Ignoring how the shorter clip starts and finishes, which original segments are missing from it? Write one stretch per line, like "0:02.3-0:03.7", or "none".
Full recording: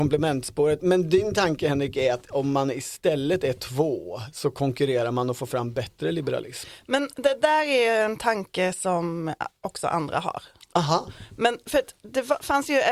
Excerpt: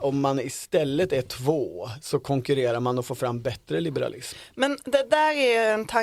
none